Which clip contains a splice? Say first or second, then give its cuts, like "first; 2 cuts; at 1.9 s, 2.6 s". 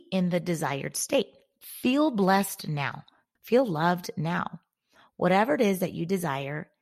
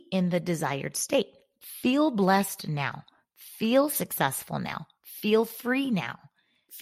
first; 1 cut; at 3.3 s